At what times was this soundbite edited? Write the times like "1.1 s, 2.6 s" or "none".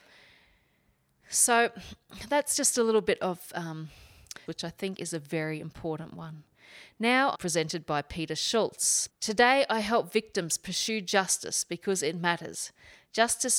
4.5 s, 7.3 s, 9.1 s